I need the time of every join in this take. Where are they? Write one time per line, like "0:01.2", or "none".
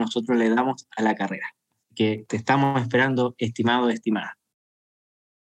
none